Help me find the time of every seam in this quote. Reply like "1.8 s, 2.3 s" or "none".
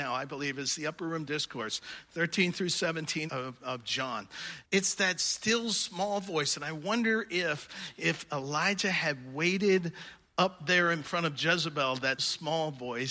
3.3 s, 4.6 s, 12.2 s